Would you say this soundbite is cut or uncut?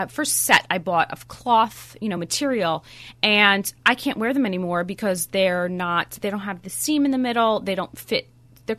uncut